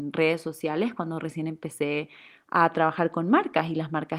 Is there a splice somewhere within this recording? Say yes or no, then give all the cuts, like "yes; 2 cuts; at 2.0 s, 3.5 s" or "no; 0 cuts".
no; 0 cuts